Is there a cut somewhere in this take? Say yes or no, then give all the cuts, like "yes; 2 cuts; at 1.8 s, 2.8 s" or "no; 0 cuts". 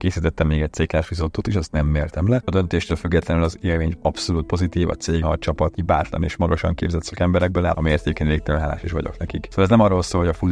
yes; 3 cuts; at 2.4 s, 5.2 s, 7.7 s